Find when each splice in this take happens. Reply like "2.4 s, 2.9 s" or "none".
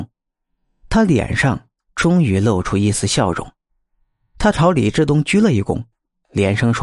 none